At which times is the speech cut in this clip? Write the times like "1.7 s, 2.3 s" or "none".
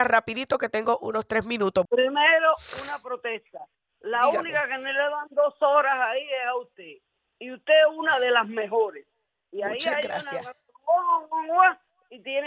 1.9 s